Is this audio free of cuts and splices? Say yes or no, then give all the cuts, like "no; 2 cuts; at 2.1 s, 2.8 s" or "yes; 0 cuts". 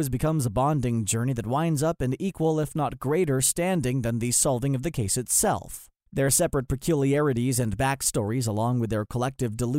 yes; 0 cuts